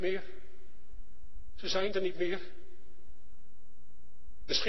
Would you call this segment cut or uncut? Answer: uncut